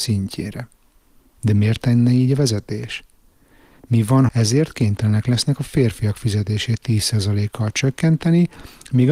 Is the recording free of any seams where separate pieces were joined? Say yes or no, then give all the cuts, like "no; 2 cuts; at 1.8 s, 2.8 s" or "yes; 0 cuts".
no; 1 cut; at 4.3 s